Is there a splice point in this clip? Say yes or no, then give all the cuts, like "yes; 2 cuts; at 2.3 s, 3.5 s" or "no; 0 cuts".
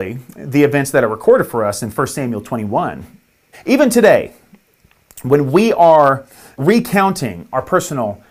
yes; 2 cuts; at 3.5 s, 6.6 s